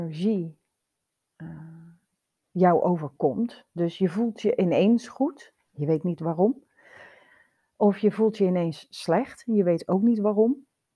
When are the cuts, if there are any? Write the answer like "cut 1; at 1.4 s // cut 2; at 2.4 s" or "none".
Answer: none